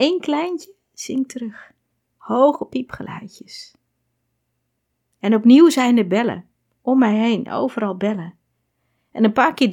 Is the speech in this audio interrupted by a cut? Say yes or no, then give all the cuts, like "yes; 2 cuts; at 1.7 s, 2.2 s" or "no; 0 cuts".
yes; 1 cut; at 5.1 s